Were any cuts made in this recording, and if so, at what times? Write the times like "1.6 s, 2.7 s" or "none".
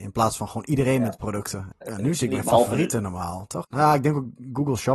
1.7 s, 3.6 s